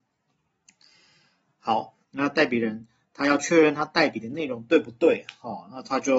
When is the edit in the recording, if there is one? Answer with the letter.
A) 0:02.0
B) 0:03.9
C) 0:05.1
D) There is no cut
A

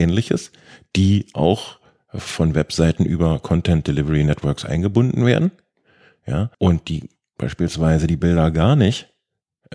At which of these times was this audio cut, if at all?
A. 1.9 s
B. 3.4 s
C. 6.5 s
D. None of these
C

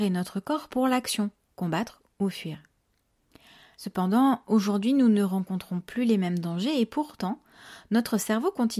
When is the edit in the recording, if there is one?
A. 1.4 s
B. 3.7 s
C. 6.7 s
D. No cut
B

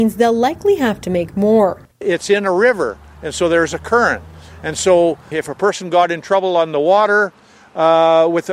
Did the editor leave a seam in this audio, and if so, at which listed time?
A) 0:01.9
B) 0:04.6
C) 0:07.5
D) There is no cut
A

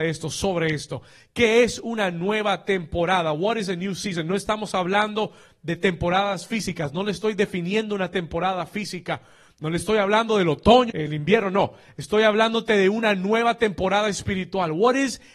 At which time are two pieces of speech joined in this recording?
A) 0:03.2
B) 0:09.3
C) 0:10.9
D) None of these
C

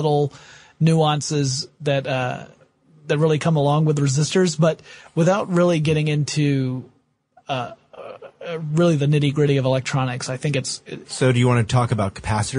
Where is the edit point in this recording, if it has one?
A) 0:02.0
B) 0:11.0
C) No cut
B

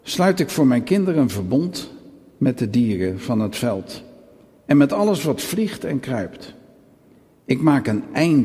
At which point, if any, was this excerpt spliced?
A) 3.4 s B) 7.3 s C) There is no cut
C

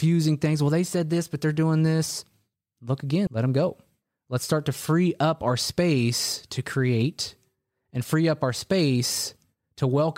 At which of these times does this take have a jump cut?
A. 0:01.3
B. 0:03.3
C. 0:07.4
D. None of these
B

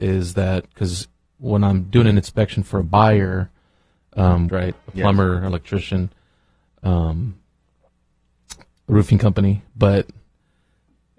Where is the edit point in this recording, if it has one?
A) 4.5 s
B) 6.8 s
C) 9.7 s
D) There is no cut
A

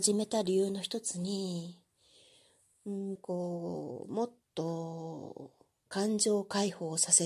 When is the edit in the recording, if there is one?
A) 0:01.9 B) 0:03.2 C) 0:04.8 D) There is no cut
B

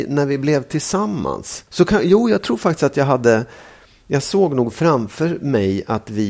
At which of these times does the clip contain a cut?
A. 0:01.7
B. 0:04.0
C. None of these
A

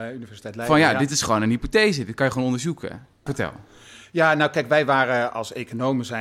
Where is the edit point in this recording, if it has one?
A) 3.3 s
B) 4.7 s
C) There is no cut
A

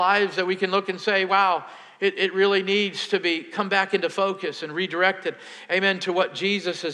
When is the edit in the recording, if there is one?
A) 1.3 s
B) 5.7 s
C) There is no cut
C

